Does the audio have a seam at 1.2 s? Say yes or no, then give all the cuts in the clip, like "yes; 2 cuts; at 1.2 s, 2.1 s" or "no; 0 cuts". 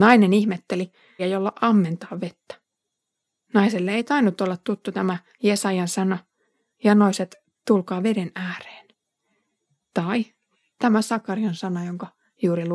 yes; 1 cut; at 1.2 s